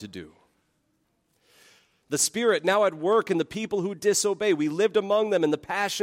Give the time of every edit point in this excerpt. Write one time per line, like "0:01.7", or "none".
0:02.0

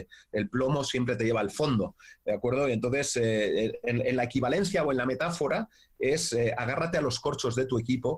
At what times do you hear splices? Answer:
none

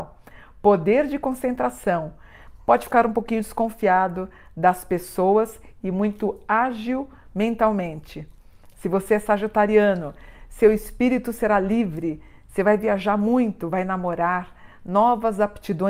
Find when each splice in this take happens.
none

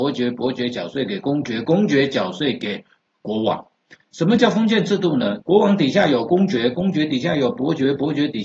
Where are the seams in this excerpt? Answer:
0:04.0
0:05.4

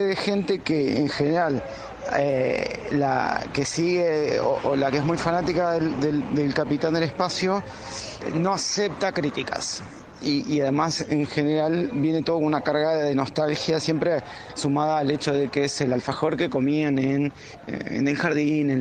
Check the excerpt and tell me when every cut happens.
none

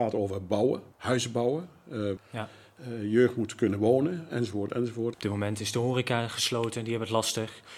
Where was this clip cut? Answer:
0:00.9
0:02.2
0:05.1

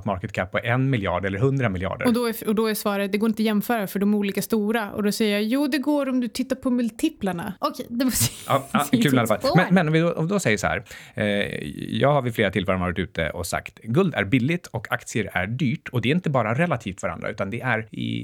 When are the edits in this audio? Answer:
none

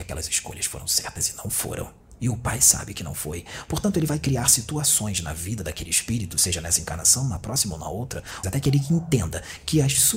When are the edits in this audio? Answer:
0:08.4

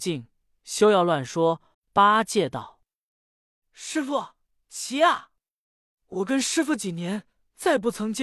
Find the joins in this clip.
0:01.7

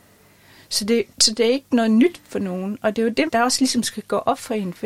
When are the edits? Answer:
0:01.1
0:03.3

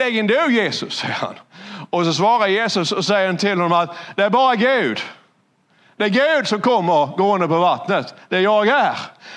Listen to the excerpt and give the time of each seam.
none

